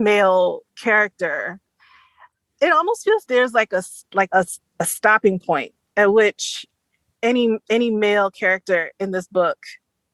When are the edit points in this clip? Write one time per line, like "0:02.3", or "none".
0:03.2
0:04.3